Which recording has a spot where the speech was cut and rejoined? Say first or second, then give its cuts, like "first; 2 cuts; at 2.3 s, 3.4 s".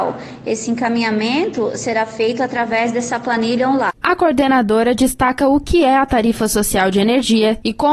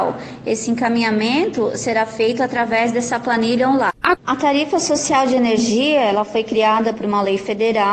second; 1 cut; at 4.1 s